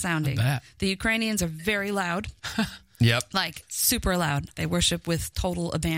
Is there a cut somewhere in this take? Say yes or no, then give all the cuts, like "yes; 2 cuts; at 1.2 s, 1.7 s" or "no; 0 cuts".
yes; 2 cuts; at 2.4 s, 4.5 s